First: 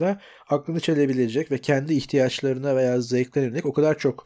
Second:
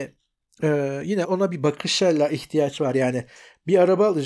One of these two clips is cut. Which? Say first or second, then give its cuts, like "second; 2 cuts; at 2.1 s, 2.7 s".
second; 1 cut; at 1.2 s